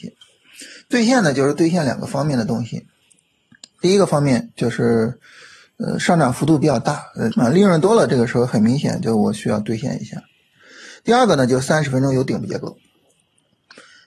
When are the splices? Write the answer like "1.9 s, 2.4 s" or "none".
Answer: 7.3 s